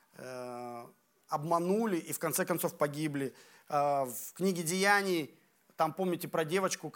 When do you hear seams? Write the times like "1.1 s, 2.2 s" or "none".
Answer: none